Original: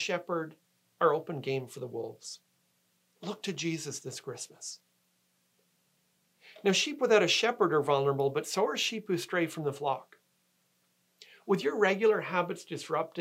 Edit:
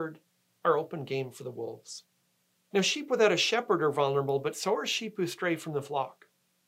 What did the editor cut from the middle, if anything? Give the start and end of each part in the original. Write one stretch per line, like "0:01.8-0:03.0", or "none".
0:03.1-0:06.6